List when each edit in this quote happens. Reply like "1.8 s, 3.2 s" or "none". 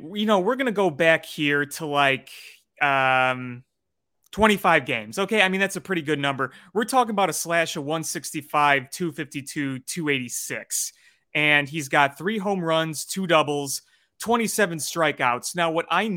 none